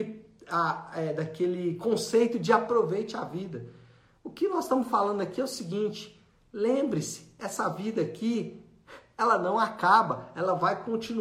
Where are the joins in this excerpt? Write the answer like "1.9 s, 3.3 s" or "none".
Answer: none